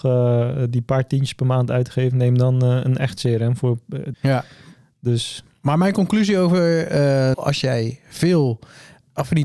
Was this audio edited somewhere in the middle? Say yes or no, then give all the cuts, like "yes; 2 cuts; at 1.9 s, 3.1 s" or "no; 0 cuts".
yes; 2 cuts; at 4.1 s, 7.3 s